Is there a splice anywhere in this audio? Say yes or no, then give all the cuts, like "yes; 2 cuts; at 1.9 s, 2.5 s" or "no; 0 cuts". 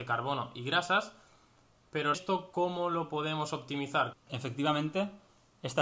yes; 2 cuts; at 2.1 s, 4.1 s